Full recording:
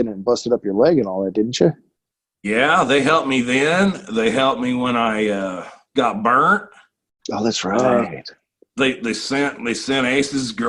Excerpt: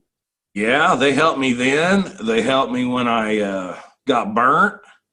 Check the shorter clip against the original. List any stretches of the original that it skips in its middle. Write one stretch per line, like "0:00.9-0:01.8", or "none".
none

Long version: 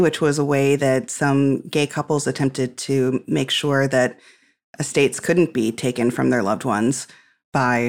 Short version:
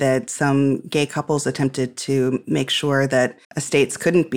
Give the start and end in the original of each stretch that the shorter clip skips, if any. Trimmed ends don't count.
0:04.3-0:04.7

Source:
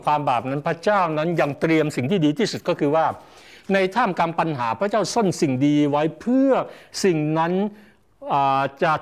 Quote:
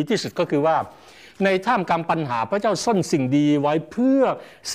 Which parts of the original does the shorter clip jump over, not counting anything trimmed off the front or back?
none

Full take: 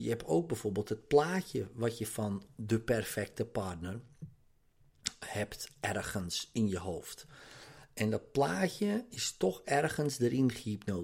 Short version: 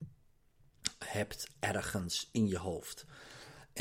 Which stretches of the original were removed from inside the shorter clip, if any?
none

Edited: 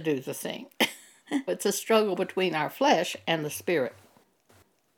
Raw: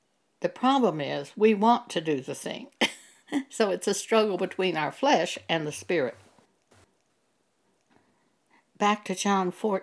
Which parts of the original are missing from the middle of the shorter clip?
0:03.5-0:03.7

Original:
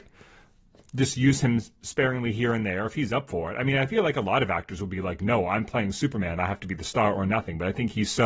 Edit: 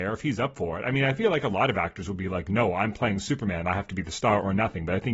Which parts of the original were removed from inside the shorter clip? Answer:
none

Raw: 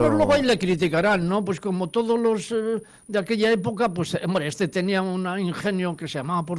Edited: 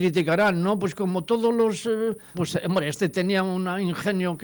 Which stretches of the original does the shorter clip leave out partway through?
0:03.0-0:03.9

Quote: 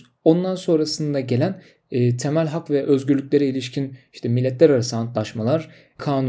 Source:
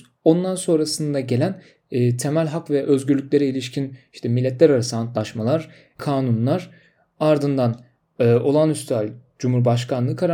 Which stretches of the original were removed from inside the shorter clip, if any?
none

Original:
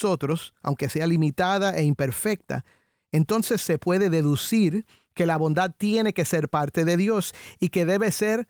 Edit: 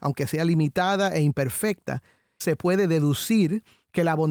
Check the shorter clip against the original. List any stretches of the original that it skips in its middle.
0:03.0-0:03.6

